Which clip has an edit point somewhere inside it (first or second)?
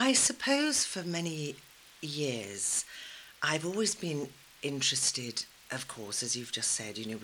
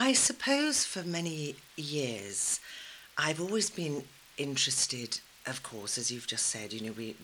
second